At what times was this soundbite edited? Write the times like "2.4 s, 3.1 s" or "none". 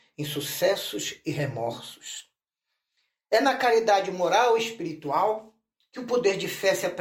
none

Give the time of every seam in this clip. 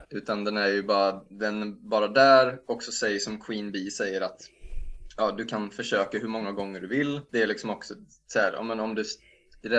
none

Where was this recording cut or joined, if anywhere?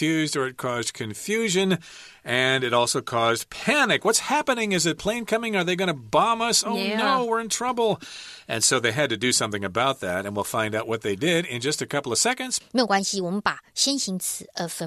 12.6 s

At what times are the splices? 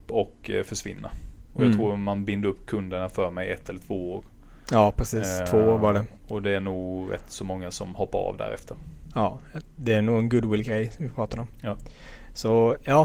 none

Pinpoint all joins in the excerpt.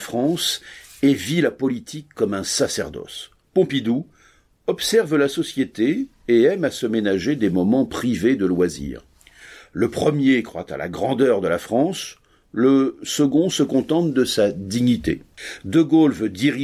none

